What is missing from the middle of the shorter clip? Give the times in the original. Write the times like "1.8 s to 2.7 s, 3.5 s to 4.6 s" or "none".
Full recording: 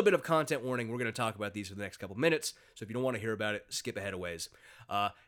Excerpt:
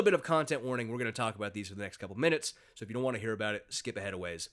none